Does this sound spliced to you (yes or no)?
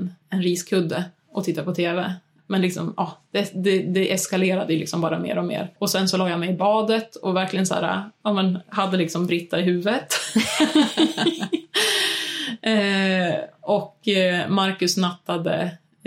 no